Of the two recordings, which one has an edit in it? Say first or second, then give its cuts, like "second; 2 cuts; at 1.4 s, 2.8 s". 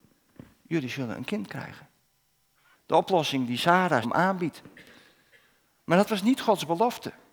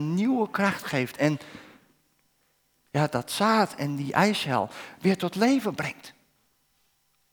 first; 2 cuts; at 2.7 s, 4.0 s